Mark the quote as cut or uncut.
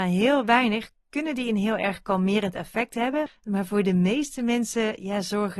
cut